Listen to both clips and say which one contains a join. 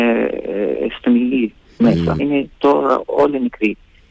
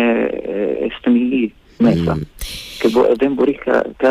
first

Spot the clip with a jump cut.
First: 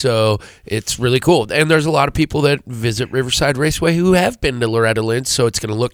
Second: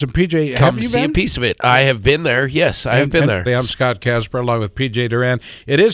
second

